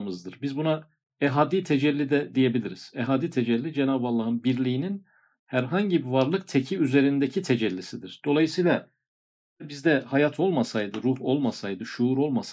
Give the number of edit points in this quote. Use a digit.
0